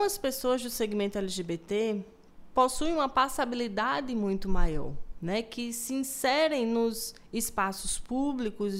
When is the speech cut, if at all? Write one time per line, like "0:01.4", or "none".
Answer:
none